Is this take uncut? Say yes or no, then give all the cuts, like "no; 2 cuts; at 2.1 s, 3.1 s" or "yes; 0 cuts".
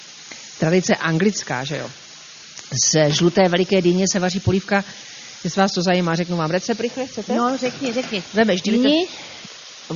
yes; 0 cuts